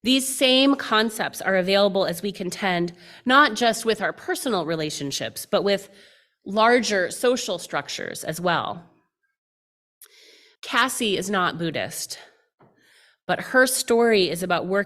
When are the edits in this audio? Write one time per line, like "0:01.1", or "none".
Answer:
0:10.6